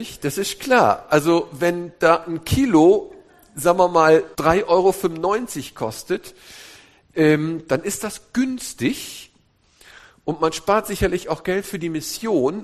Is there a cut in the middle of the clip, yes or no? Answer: yes